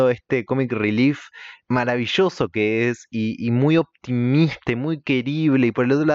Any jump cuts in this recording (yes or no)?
no